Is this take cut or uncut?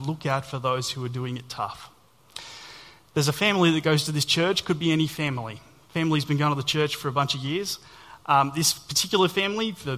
uncut